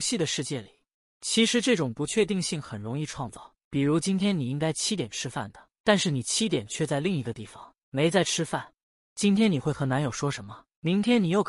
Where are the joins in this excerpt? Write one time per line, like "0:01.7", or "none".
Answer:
0:01.1
0:09.0